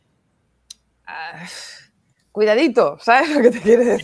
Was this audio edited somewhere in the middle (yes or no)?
no